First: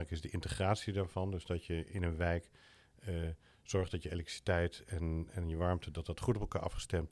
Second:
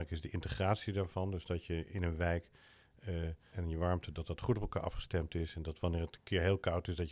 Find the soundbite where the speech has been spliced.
second; 1 cut; at 3.5 s

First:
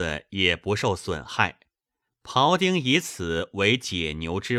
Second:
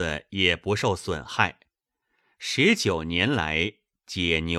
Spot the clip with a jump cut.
first; 1 cut; at 2.1 s

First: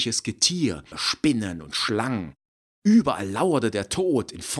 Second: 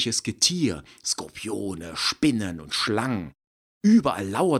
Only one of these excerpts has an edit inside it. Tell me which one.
first; 1 cut; at 0.9 s

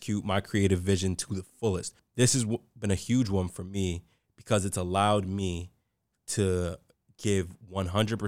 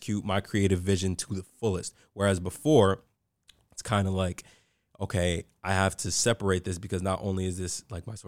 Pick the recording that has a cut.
first; 1 cut; at 2.0 s

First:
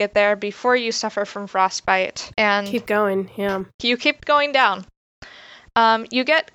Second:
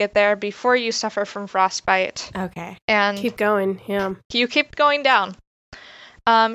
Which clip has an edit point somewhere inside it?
first; 1 cut; at 2.3 s

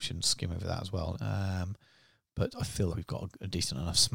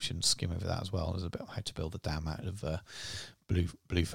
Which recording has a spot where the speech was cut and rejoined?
first; 2 cuts; at 1.1 s, 2.9 s

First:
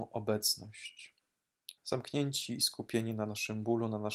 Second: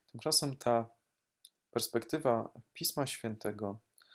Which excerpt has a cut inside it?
first; 1 cut; at 1.8 s

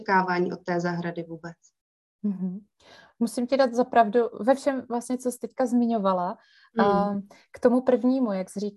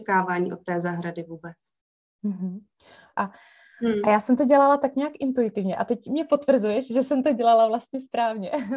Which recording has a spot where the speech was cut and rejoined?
second; 1 cut; at 3.1 s

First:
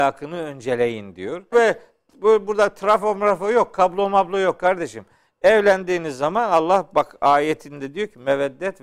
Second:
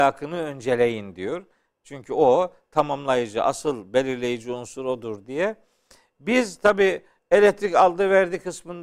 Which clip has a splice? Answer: first; 1 cut; at 1.5 s

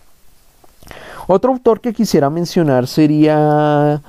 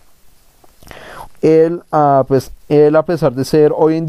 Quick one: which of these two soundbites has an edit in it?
second; 2 cuts; at 1.3 s, 2.6 s

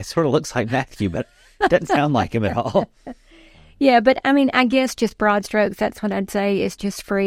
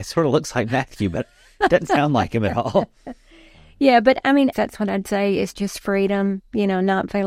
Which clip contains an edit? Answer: second; 1 cut; at 4.5 s

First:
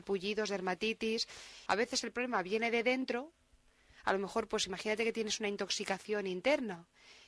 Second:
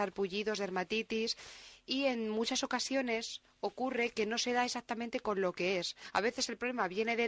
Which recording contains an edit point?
first; 1 cut; at 1.7 s

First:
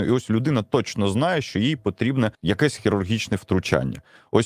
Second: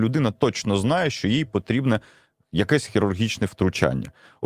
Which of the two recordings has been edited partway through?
first; 1 cut; at 2.3 s

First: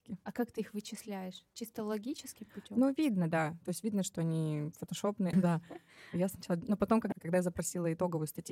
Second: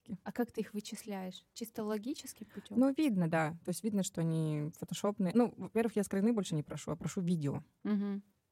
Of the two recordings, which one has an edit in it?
first; 2 cuts; at 5.3 s, 7.1 s

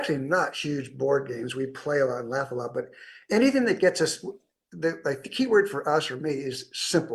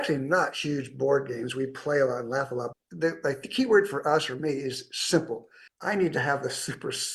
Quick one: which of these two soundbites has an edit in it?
second; 2 cuts; at 2.7 s, 5.7 s

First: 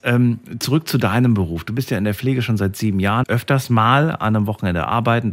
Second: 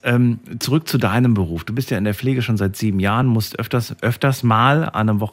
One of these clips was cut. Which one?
first; 1 cut; at 3.2 s

